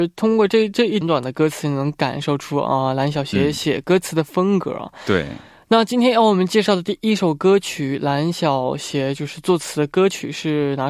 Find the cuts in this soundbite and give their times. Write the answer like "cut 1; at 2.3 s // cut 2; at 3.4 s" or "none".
cut 1; at 1.0 s